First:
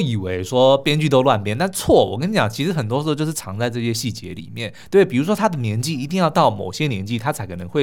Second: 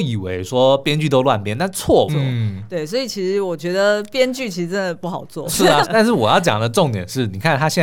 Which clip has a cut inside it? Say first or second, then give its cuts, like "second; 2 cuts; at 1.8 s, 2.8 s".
second; 2 cuts; at 2.1 s, 5.8 s